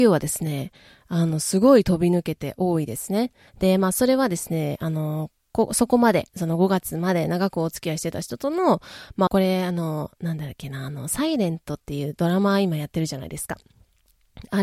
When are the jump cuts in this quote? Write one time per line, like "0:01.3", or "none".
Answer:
0:03.5
0:09.3